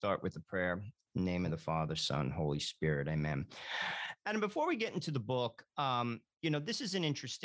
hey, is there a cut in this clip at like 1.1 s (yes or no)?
yes